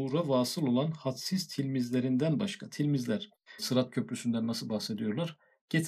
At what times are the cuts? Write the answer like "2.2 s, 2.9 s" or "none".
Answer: 3.6 s